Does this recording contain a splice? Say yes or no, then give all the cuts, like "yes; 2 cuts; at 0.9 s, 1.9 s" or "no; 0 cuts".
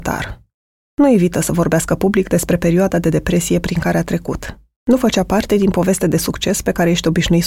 yes; 1 cut; at 4.8 s